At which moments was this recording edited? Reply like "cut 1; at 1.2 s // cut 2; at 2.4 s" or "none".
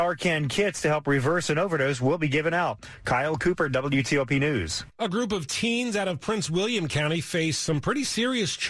none